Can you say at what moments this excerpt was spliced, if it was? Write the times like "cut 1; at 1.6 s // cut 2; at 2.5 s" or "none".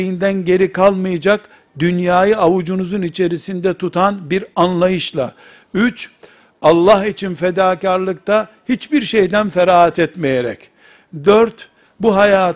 none